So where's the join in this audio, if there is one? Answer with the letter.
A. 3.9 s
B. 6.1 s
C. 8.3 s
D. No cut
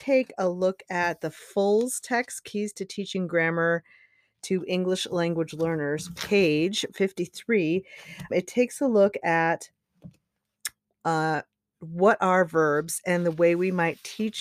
C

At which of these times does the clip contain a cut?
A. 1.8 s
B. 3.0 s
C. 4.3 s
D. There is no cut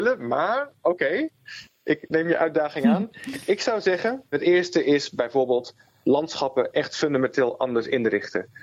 C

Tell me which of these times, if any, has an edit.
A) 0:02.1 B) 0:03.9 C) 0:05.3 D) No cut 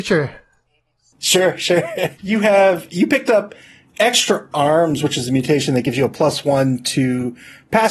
A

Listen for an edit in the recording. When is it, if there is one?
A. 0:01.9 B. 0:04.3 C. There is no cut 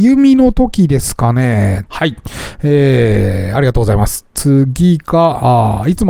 A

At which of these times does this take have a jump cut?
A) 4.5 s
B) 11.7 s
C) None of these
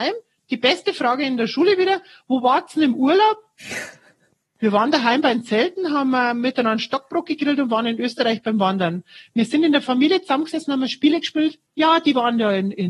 B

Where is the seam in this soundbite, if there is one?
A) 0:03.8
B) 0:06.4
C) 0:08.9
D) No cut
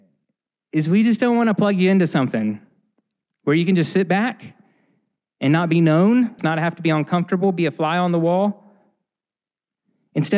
B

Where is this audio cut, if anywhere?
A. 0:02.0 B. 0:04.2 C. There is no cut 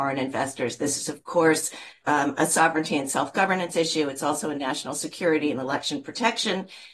A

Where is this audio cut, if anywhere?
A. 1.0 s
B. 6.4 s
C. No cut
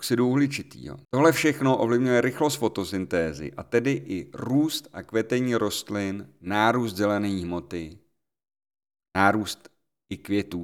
A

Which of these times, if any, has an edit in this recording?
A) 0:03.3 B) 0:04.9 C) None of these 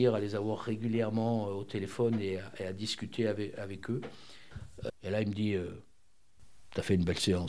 B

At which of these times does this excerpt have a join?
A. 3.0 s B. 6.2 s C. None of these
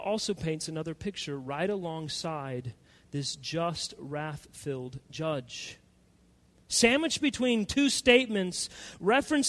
C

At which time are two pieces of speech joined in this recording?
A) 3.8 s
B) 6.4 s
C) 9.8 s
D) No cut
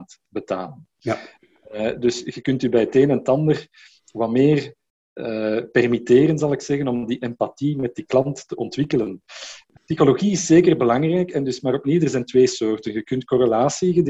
C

